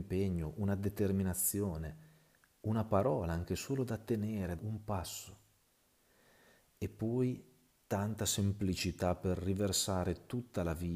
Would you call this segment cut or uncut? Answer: cut